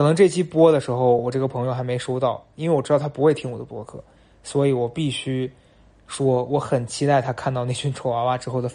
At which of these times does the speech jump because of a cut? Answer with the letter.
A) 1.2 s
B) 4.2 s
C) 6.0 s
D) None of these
D